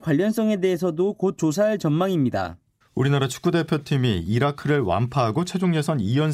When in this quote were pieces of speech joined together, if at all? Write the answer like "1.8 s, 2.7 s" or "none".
2.8 s